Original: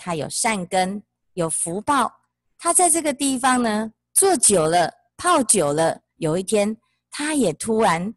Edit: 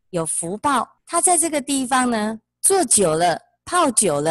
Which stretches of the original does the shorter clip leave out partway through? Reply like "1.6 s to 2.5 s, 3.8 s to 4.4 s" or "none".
2.2 s to 2.5 s